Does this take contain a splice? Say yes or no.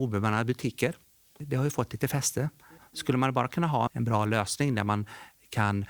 yes